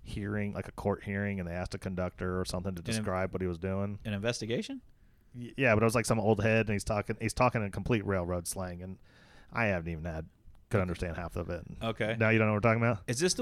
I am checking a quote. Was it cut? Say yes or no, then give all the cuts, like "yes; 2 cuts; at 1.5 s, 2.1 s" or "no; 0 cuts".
no; 0 cuts